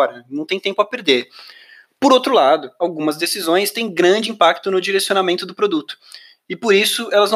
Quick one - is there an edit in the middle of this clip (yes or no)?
no